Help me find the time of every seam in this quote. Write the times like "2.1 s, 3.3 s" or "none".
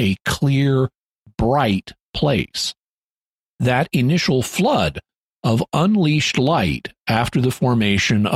none